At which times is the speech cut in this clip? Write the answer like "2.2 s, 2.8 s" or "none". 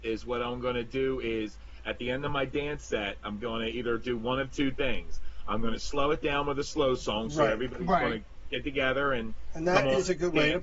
none